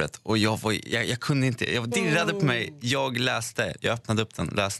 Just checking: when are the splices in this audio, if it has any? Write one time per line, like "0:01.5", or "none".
0:01.9